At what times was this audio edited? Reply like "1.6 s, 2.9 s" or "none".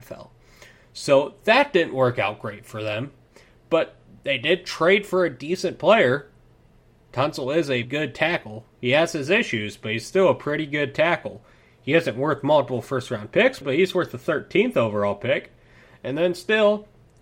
7.8 s, 13.6 s